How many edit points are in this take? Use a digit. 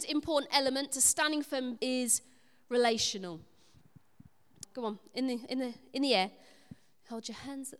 2